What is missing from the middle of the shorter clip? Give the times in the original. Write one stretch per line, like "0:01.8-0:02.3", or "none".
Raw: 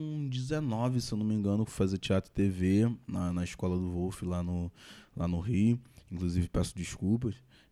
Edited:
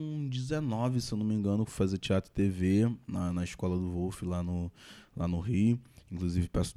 none